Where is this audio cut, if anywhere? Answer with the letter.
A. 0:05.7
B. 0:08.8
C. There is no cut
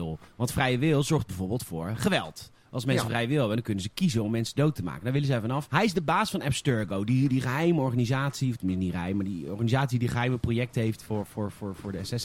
A